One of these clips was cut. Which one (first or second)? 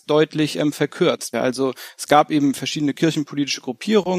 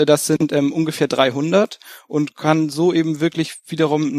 first